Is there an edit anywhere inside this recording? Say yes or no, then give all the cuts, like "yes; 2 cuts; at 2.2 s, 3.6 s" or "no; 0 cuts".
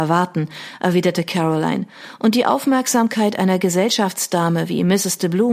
no; 0 cuts